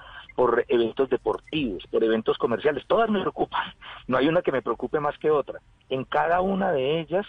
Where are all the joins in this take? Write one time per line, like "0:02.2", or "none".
none